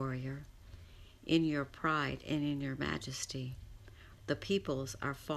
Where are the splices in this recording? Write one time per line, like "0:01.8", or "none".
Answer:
0:04.2